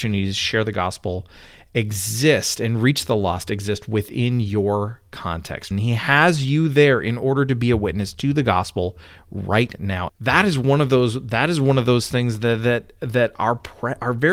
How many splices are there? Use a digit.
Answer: 2